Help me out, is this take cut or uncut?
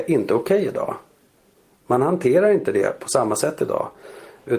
uncut